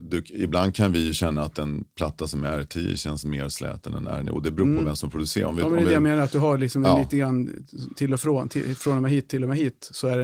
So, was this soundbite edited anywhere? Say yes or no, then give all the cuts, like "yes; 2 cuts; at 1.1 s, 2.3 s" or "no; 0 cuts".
no; 0 cuts